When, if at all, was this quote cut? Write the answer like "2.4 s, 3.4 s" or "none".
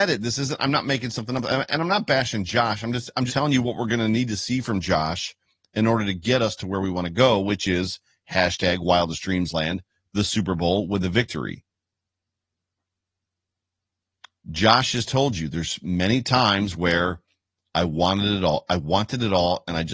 3.3 s